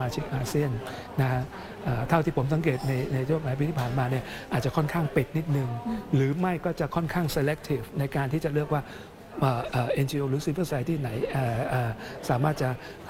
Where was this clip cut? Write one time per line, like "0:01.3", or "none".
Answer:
0:10.7